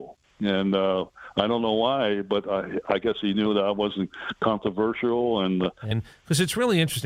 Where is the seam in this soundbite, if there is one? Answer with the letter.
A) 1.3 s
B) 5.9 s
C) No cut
B